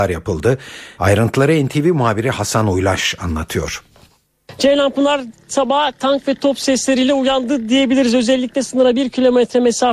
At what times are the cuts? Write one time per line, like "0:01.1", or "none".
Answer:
0:01.0